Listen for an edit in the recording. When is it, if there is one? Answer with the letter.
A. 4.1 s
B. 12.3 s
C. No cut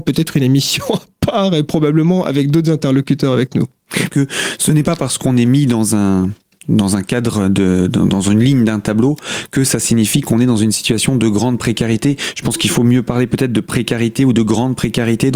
A